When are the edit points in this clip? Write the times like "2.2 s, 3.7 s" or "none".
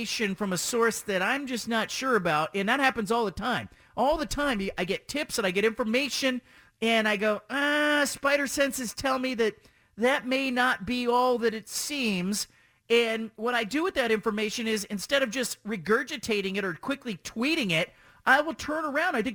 none